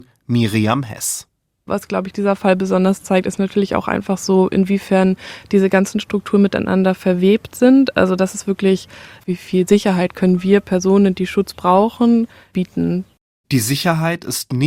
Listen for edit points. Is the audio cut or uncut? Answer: uncut